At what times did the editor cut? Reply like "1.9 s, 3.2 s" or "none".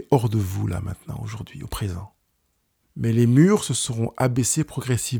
2.8 s

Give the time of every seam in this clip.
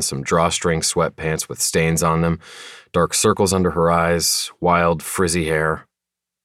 none

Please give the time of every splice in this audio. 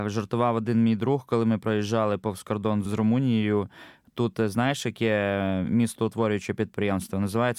2.9 s

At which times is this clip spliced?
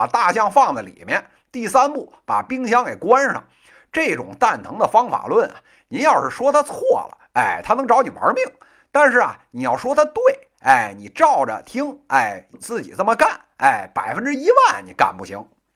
12.5 s

